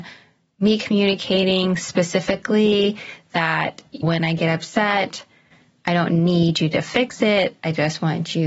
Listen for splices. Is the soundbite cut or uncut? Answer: cut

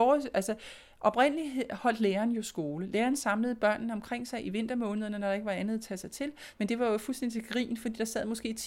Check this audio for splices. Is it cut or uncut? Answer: cut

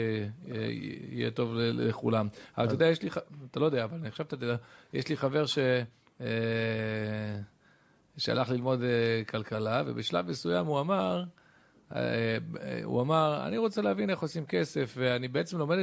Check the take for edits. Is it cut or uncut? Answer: uncut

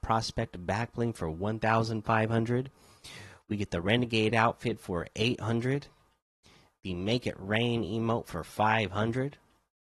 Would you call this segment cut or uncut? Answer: uncut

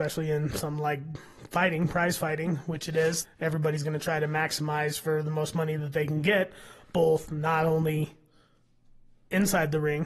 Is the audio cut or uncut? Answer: cut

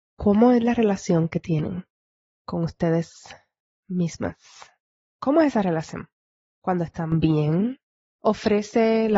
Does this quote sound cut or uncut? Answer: cut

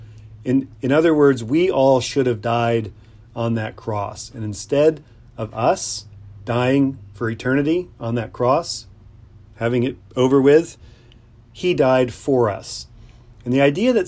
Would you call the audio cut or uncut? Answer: uncut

